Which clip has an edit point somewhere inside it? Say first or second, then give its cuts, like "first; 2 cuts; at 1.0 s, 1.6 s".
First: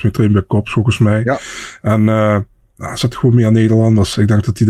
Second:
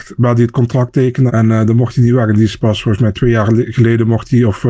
second; 1 cut; at 1.3 s